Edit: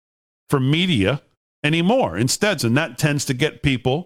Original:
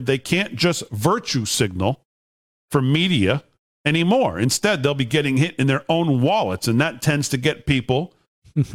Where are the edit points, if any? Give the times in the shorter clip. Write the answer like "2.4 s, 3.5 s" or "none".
2.6 s